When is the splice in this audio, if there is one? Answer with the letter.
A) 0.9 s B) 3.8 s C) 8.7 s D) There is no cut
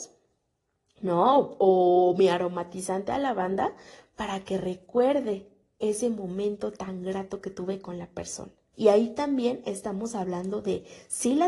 C